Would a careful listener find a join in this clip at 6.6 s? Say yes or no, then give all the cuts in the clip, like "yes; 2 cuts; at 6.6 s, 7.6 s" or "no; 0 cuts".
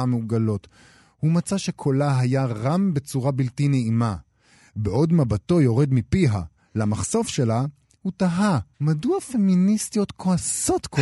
yes; 2 cuts; at 6.6 s, 8.7 s